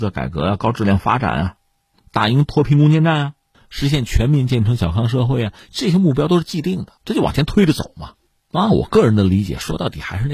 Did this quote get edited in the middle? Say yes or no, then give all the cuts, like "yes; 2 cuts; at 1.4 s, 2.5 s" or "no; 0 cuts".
yes; 1 cut; at 7.0 s